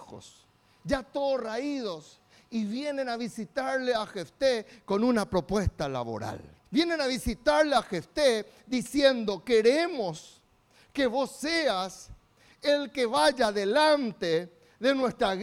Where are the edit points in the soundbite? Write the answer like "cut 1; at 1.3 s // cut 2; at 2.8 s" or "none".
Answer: cut 1; at 6.6 s

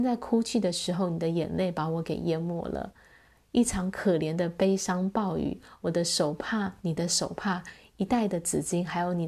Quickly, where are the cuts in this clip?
none

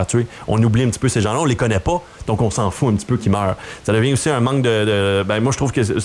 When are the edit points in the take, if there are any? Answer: cut 1; at 3.8 s

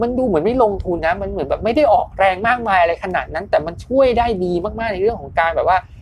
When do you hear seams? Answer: cut 1; at 1.0 s

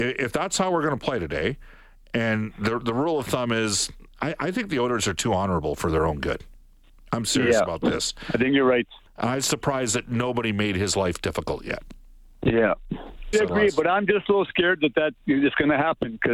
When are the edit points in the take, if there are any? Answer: cut 1; at 9.1 s // cut 2; at 13.3 s

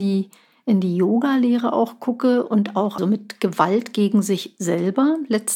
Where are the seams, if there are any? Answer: cut 1; at 3.0 s

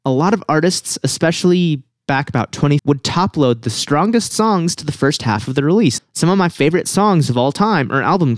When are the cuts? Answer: cut 1; at 2.8 s // cut 2; at 6.0 s

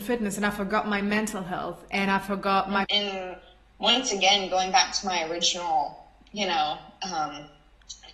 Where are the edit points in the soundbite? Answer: cut 1; at 2.8 s

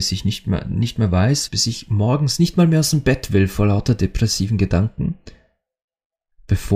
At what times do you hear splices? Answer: cut 1; at 1.5 s

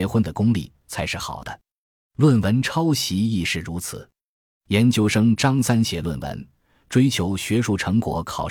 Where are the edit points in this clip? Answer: none

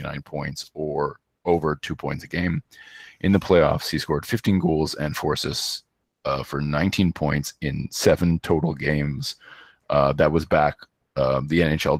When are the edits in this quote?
none

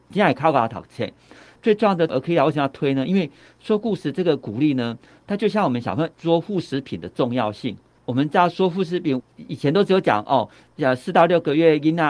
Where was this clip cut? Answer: none

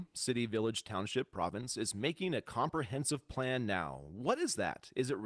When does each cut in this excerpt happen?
none

